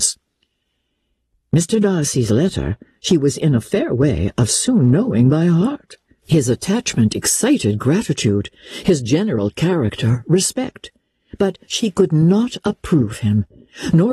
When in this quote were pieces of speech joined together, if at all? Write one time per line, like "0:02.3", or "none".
0:06.2